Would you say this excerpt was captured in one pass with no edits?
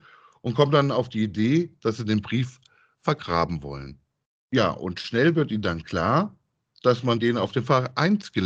yes; 0 cuts

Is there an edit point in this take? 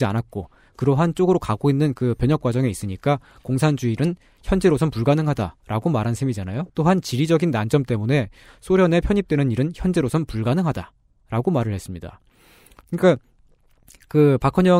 yes; 1 cut; at 6.7 s

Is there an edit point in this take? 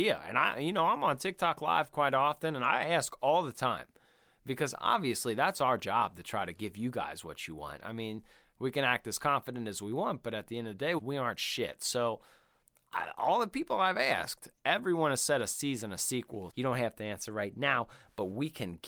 yes; 2 cuts; at 11.0 s, 16.5 s

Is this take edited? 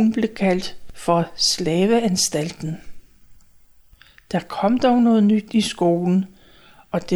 no; 0 cuts

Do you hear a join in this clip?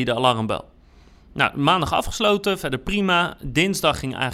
no; 0 cuts

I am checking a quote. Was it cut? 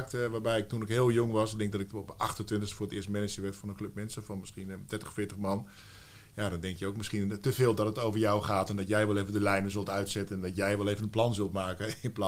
no; 0 cuts

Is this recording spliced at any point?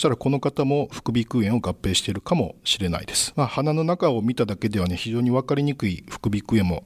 yes; 1 cut; at 3.3 s

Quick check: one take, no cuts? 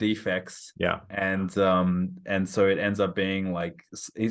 yes; 0 cuts

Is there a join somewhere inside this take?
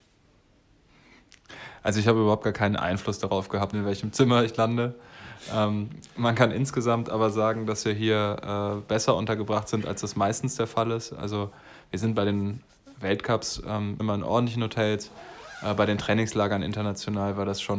yes; 2 cuts; at 3.7 s, 14.0 s

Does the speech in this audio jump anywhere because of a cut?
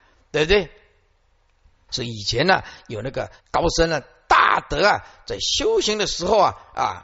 yes; 2 cuts; at 1.9 s, 3.4 s

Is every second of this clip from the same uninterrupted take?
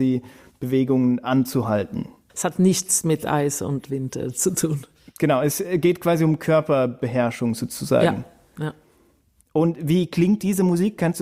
no; 1 cut; at 2.3 s

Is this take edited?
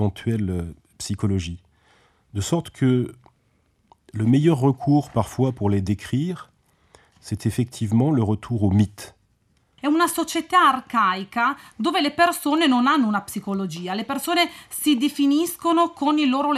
yes; 1 cut; at 9.8 s

